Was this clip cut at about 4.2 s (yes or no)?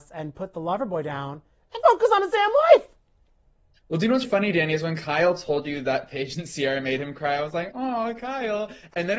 yes